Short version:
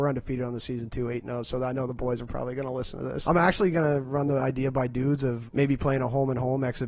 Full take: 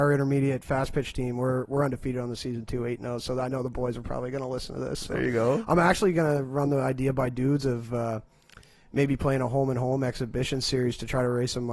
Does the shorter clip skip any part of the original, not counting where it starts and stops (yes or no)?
yes